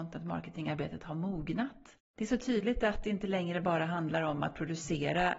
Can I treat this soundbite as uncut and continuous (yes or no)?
yes